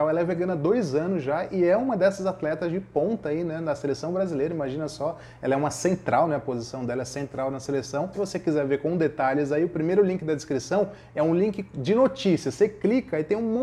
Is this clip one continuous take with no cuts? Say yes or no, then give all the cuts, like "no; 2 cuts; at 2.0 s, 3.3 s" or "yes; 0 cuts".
no; 1 cut; at 8.1 s